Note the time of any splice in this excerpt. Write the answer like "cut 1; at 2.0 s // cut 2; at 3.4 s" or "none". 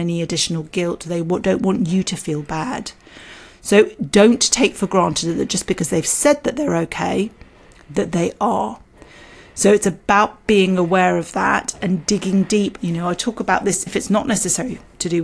cut 1; at 12.8 s // cut 2; at 13.9 s